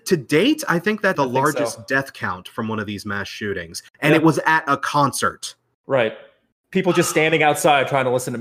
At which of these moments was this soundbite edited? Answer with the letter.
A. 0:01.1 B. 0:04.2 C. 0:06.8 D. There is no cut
A